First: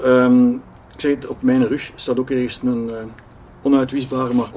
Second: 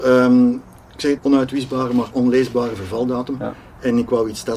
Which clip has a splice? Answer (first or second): second